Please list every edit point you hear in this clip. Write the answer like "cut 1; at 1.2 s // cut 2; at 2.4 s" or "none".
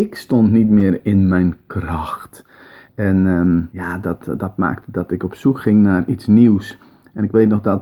cut 1; at 3.7 s